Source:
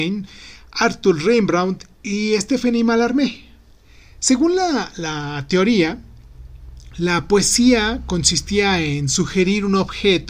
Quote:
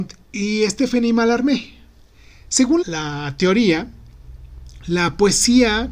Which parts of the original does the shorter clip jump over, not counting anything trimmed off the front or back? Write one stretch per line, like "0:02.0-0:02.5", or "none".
0:04.5-0:04.9